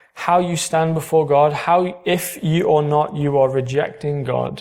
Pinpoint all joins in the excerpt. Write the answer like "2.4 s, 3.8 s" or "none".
none